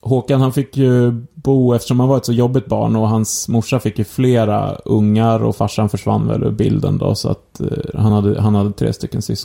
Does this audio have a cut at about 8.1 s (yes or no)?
no